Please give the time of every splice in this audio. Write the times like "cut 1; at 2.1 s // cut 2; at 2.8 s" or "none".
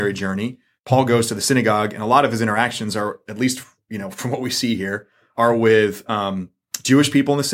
none